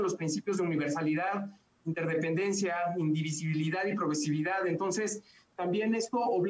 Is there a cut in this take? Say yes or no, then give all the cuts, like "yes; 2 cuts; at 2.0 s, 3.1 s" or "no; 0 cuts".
no; 0 cuts